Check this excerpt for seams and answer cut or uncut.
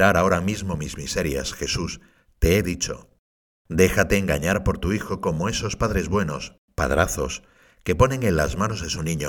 uncut